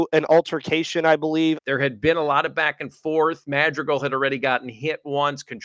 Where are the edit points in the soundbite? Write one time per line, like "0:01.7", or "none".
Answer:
0:01.6